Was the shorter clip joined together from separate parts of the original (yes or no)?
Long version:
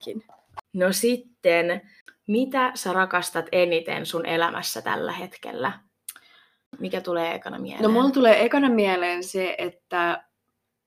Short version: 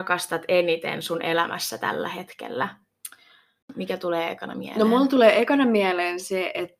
no